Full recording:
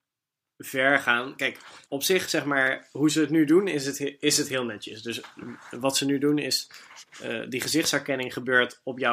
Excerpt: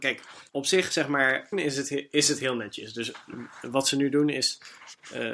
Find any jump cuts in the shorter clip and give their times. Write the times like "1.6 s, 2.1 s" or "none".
1.5 s